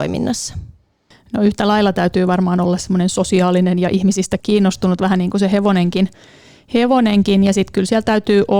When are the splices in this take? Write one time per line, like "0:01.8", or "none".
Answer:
0:04.4